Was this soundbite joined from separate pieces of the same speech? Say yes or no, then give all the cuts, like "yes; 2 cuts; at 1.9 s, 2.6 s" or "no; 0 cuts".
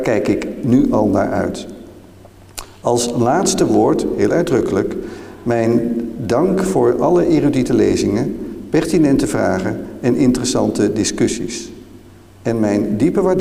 no; 0 cuts